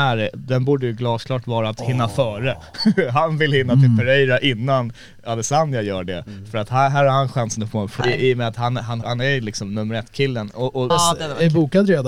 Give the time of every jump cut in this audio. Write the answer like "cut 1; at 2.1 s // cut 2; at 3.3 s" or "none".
cut 1; at 8.0 s // cut 2; at 9.0 s // cut 3; at 10.9 s